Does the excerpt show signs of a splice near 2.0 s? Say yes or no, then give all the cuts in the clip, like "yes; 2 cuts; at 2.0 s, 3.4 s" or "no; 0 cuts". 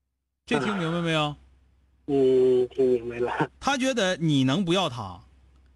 no; 1 cut; at 3.6 s